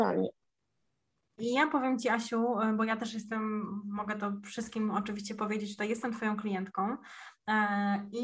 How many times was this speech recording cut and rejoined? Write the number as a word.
one